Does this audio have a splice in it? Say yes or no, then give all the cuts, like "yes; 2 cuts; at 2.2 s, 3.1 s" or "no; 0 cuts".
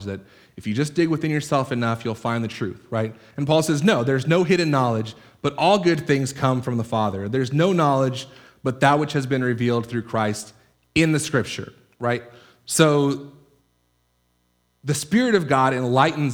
no; 0 cuts